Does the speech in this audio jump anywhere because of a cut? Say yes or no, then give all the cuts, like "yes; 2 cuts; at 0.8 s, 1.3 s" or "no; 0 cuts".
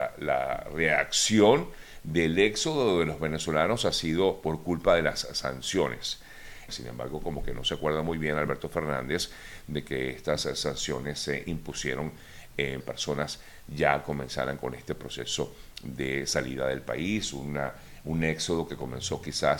yes; 2 cuts; at 6.7 s, 12.8 s